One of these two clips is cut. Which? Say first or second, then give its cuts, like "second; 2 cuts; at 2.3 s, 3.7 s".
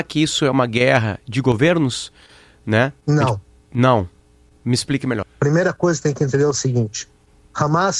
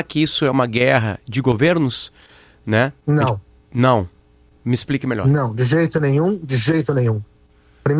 first; 1 cut; at 5.2 s